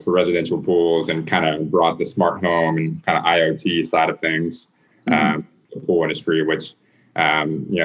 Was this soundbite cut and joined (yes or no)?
no